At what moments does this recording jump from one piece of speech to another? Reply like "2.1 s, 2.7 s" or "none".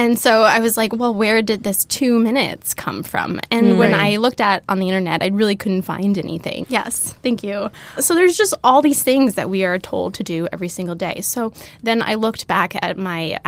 6.6 s